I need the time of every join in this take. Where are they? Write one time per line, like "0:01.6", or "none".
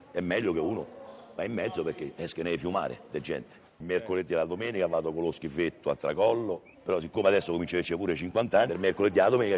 0:03.7
0:06.7
0:08.7